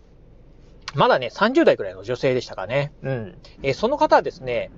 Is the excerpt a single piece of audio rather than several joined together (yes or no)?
no